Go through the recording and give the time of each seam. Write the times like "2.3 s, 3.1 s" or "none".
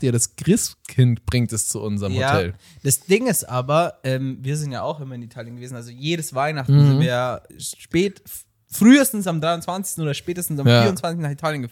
7.5 s